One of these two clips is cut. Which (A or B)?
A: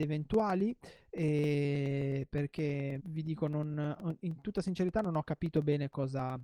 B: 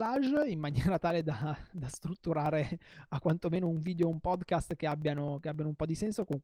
A